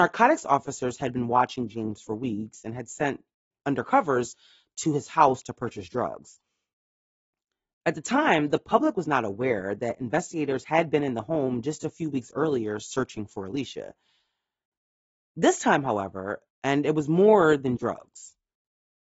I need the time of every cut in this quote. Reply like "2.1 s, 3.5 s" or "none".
16.5 s, 17.8 s